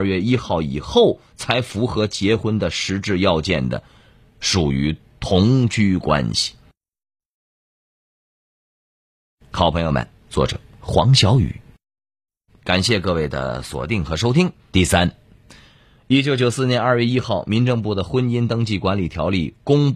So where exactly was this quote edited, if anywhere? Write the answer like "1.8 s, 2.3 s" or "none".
10.2 s, 12.5 s, 14.7 s